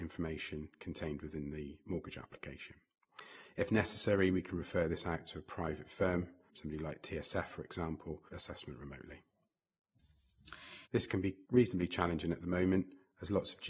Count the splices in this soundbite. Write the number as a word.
three